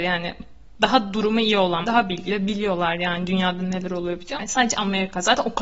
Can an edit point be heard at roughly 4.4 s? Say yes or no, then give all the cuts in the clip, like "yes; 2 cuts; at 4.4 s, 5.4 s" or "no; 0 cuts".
yes; 2 cuts; at 1.8 s, 4.4 s